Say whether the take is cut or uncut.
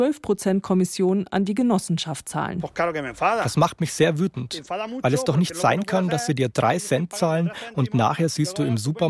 uncut